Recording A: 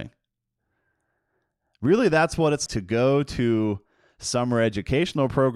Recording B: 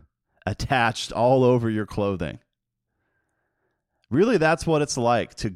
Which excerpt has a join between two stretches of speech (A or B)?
A